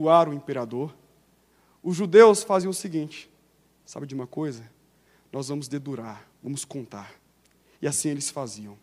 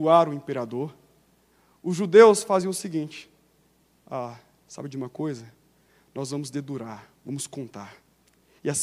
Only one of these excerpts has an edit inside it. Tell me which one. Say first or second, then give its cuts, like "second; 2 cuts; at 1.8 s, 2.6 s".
first; 1 cut; at 3.8 s